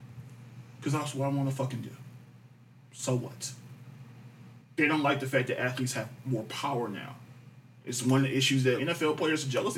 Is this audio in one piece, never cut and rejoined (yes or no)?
no